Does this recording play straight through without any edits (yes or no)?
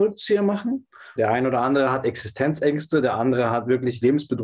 no